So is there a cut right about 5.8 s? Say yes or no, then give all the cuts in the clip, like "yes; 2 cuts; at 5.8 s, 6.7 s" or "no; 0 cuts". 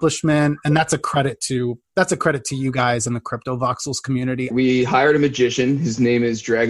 no; 1 cut; at 4.5 s